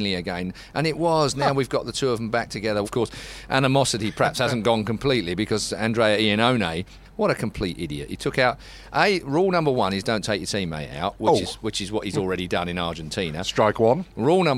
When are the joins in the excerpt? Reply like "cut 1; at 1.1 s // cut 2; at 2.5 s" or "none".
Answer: cut 1; at 2.8 s